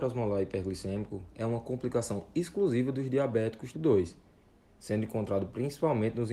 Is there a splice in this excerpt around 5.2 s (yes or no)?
no